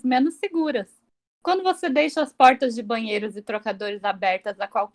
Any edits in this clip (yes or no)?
no